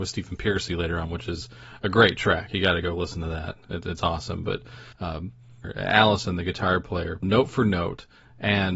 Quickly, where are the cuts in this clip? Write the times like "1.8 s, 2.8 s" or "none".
4.9 s, 7.2 s